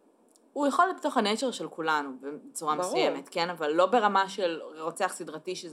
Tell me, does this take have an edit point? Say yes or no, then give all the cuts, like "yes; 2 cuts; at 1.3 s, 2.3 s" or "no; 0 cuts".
no; 0 cuts